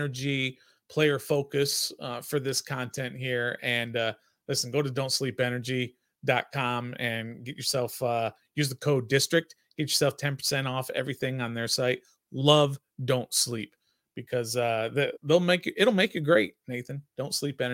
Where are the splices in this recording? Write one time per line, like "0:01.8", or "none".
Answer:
0:15.2